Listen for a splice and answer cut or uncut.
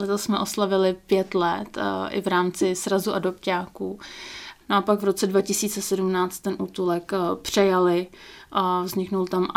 cut